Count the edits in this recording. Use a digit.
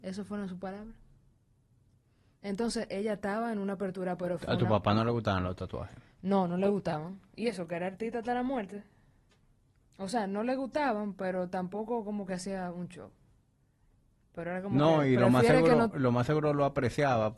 1